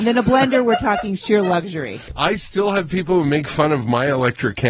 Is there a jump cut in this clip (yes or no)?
yes